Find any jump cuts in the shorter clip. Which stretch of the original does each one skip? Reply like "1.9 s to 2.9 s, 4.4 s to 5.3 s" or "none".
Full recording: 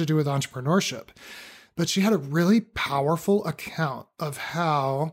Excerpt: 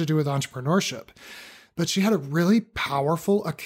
none